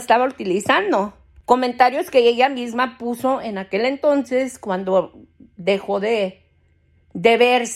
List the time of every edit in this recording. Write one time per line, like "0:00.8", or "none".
none